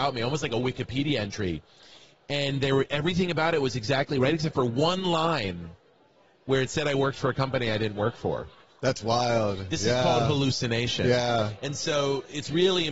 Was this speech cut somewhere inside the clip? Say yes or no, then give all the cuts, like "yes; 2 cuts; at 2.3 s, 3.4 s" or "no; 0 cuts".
no; 0 cuts